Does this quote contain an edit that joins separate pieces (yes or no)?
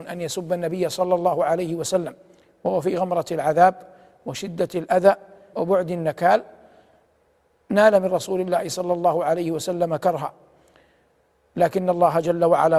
yes